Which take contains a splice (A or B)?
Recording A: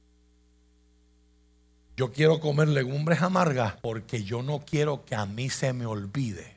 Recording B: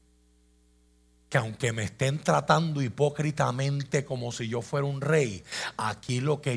A